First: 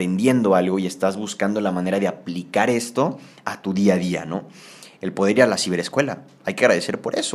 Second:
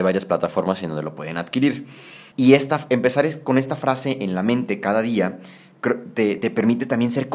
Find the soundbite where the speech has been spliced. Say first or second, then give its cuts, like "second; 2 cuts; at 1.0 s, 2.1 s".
second; 2 cuts; at 2.3 s, 6.4 s